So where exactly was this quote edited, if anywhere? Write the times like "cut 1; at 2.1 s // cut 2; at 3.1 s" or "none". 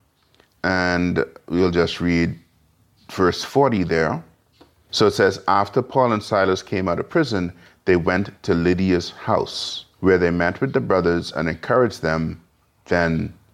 cut 1; at 4.9 s // cut 2; at 9.9 s